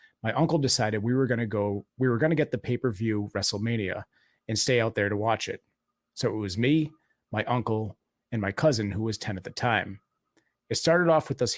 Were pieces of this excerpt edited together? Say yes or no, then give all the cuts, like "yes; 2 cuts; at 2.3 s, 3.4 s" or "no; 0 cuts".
no; 0 cuts